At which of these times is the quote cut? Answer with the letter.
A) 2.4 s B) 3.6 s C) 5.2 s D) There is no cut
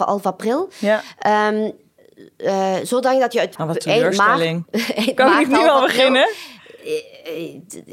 B